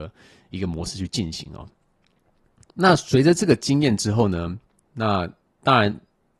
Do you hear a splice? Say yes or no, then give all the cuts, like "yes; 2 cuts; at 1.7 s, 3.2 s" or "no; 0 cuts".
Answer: yes; 1 cut; at 4.9 s